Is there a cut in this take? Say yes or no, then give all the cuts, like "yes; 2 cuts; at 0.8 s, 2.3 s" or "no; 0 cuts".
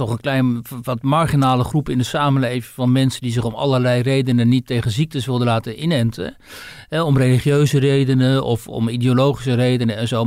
no; 0 cuts